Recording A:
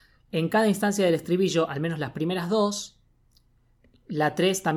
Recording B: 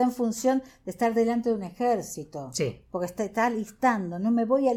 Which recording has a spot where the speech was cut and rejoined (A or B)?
A